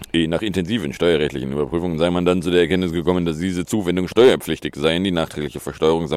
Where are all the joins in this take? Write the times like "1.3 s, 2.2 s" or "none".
none